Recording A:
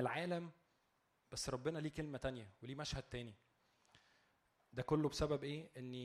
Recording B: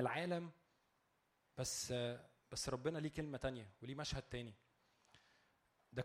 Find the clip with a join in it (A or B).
A